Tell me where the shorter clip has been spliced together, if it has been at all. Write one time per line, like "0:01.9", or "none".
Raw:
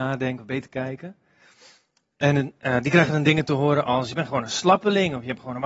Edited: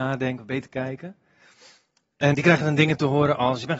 0:02.3

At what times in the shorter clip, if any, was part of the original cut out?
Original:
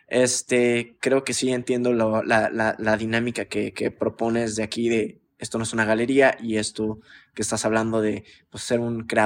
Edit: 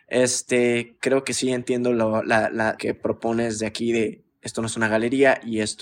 0:02.8

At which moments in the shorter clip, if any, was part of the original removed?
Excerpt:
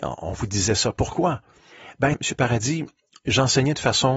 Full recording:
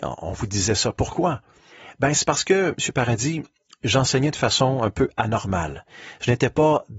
0:02.1

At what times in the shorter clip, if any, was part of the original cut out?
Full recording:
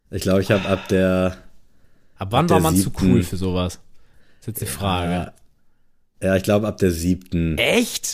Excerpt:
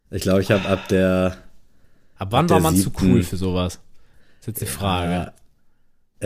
none

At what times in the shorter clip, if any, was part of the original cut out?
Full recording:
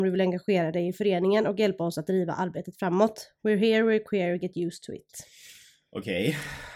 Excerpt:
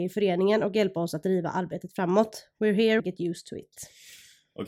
0:03.0

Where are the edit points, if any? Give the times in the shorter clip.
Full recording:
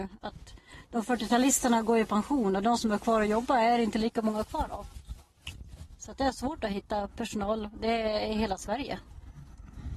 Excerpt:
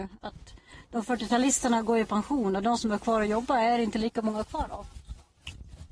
none

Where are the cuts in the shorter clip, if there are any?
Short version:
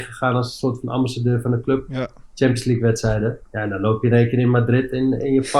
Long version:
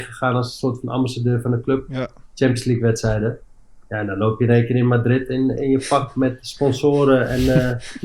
0:03.4

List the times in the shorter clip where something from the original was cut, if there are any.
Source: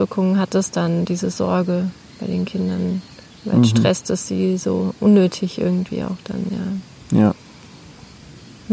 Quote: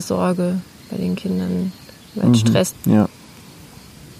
0:02.7

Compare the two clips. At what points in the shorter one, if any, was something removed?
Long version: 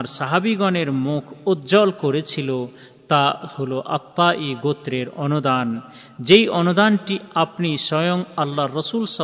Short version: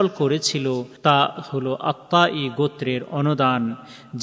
0:01.0

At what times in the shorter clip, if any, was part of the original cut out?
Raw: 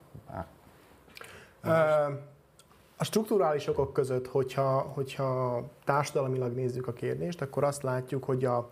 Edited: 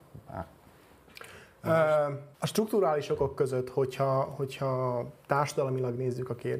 0:02.3

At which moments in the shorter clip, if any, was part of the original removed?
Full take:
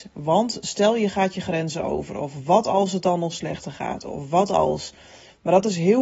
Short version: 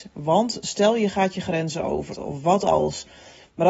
0:02.1

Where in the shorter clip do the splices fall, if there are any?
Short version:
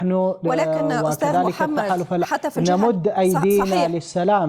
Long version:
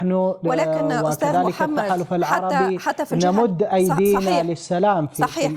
0:02.2

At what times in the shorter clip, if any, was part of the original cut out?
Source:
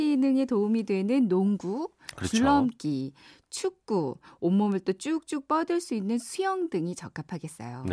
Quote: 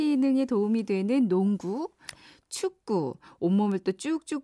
0:02.1

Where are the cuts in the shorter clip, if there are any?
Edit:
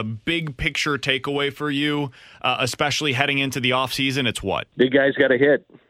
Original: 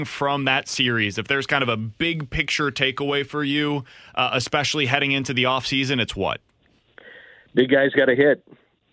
0:04.7

